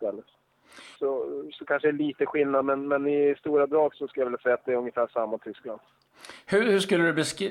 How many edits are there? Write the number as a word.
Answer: two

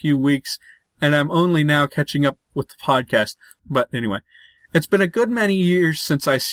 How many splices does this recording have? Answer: one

